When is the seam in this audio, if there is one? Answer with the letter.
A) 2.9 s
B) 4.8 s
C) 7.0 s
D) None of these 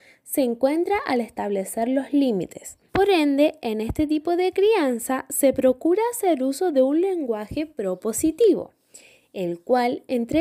A